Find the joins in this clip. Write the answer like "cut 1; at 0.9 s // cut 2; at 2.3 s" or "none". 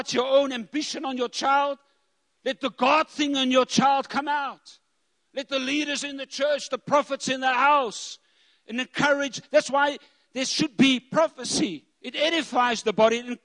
cut 1; at 11.9 s